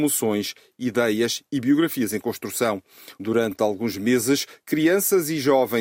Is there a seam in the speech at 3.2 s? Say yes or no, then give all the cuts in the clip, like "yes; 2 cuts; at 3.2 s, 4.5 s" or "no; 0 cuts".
yes; 1 cut; at 3.2 s